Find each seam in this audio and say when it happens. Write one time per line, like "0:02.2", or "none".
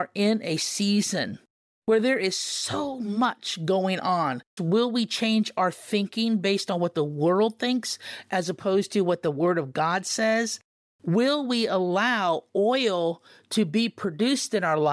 0:04.6